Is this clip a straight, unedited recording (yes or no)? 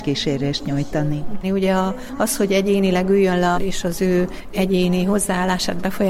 no